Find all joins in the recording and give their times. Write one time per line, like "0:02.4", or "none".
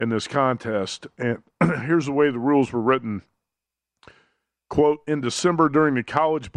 none